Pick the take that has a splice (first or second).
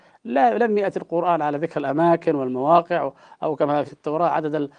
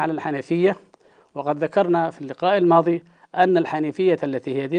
first